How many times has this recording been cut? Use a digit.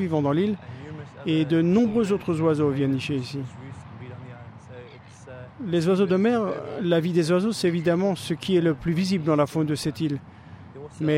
0